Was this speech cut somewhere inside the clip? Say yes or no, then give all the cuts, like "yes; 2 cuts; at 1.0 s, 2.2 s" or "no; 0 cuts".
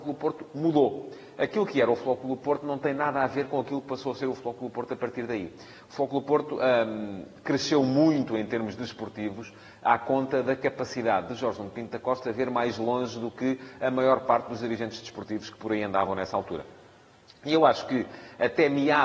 no; 0 cuts